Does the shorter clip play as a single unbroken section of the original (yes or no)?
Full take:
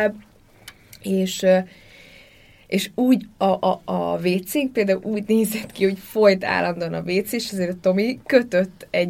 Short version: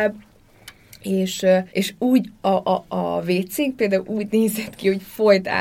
no